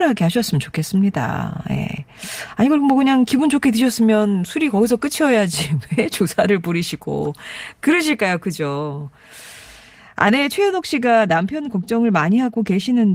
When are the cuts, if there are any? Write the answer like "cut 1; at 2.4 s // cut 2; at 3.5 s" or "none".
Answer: none